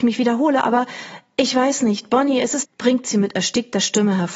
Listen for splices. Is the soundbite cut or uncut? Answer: cut